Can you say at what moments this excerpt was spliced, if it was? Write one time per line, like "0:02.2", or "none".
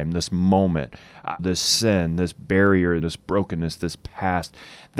0:01.4
0:03.0